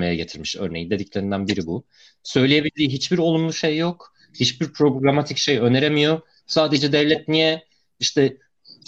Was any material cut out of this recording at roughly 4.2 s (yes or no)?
no